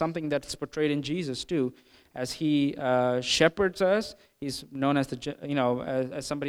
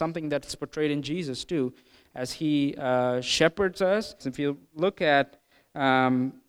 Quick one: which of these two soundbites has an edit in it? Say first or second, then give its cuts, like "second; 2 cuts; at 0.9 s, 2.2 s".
second; 1 cut; at 4.2 s